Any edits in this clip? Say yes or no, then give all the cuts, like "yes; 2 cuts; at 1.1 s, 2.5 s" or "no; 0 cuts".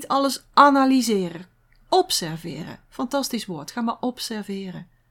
no; 0 cuts